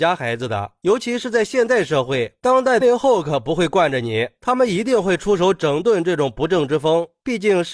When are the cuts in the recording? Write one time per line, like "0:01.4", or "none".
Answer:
0:02.8
0:04.4